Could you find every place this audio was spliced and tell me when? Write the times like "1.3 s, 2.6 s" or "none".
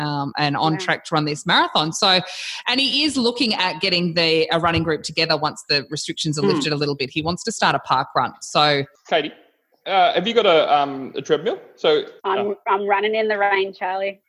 12.2 s